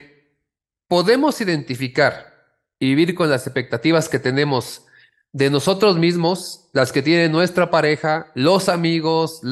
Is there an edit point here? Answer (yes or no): no